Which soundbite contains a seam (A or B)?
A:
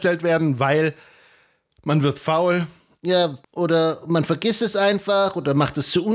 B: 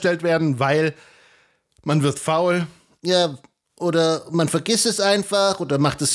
A